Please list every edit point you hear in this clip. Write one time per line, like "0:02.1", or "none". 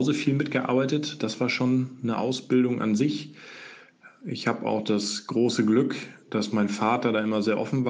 none